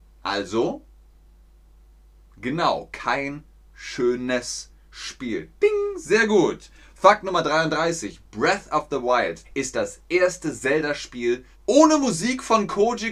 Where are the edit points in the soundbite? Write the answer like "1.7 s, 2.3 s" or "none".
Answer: 9.4 s, 11.5 s